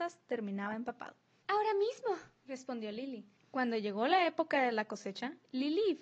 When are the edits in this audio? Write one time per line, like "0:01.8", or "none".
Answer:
0:01.4
0:03.4